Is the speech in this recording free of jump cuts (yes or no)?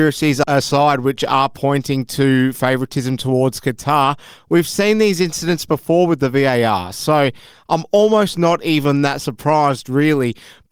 yes